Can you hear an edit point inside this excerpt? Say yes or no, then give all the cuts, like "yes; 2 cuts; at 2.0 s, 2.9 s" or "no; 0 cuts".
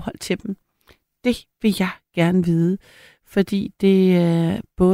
no; 0 cuts